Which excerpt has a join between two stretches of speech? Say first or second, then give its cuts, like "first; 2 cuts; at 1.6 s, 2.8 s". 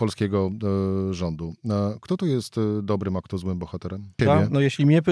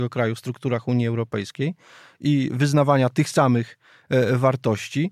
first; 1 cut; at 4.2 s